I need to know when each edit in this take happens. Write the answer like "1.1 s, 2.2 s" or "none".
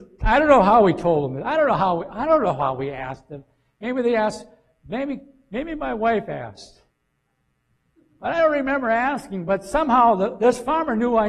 none